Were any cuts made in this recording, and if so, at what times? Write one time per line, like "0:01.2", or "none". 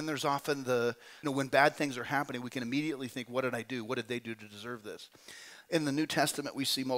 0:01.2